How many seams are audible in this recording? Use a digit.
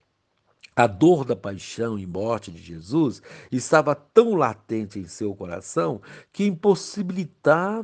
0